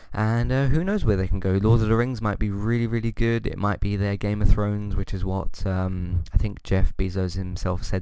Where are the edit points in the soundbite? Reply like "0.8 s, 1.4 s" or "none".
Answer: none